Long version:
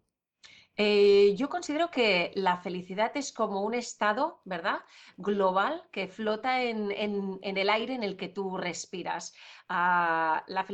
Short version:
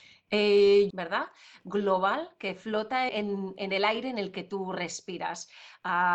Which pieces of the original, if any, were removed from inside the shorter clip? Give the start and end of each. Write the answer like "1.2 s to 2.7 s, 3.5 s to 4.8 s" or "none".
1.4 s to 4.4 s, 6.6 s to 6.9 s